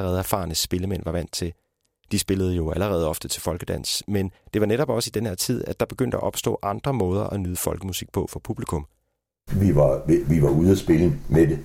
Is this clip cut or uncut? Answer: cut